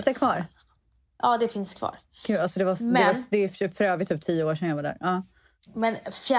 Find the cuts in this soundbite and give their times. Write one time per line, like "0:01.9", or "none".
none